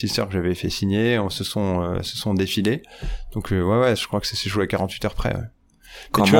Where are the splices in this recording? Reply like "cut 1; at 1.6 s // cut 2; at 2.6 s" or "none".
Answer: cut 1; at 4.0 s